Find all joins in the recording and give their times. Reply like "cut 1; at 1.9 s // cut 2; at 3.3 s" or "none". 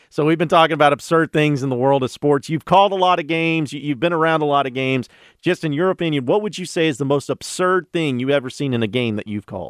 none